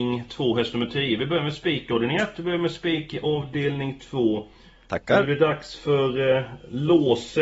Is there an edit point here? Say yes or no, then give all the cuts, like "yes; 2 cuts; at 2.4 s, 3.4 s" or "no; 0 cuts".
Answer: no; 0 cuts